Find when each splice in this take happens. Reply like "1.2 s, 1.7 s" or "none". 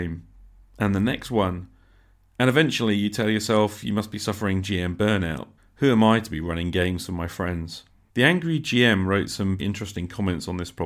5.6 s, 8.1 s, 9.6 s